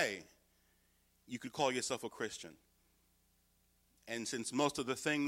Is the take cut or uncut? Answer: uncut